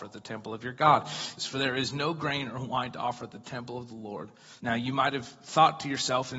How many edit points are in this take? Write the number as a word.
two